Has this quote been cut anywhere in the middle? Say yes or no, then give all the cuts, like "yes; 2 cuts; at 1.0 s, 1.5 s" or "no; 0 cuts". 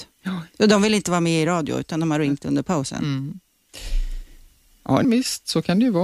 yes; 1 cut; at 5.0 s